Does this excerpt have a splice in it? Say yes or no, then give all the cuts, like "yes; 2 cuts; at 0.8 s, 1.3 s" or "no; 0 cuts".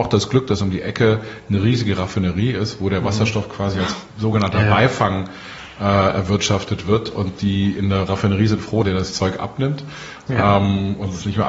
yes; 1 cut; at 8.8 s